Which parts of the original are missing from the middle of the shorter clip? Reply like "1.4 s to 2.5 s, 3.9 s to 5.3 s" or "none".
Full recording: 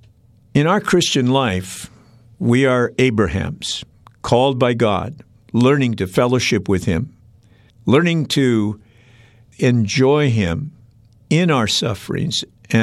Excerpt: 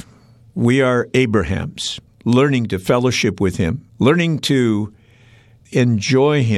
3.9 s to 5.4 s, 7.2 s to 7.8 s